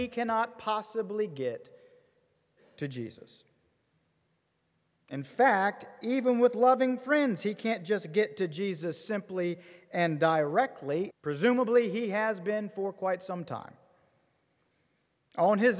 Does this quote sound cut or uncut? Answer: cut